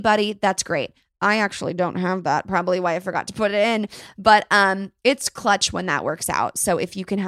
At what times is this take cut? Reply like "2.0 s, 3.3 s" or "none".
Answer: none